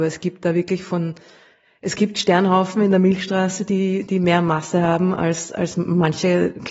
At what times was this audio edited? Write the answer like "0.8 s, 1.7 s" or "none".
none